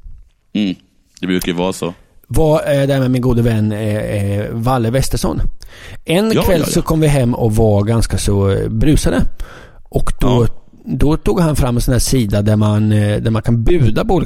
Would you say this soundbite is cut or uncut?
uncut